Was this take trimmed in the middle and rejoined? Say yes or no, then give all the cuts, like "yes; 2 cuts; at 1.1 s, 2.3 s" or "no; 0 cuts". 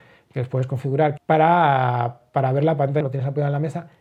yes; 2 cuts; at 1.2 s, 3.0 s